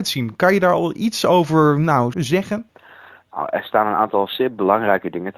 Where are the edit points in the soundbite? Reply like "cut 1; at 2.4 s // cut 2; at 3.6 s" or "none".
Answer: cut 1; at 2.1 s